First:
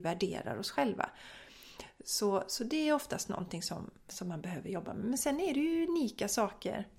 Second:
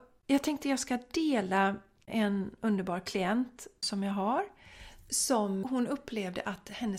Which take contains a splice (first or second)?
second